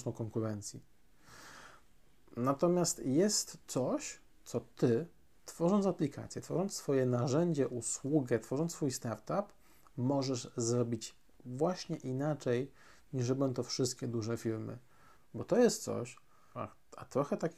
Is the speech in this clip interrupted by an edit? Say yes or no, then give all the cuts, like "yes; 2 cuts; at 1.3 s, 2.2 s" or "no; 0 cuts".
yes; 2 cuts; at 15.2 s, 16.5 s